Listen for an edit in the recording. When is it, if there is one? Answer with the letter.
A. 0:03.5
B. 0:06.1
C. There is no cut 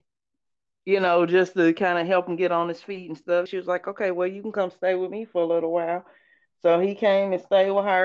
A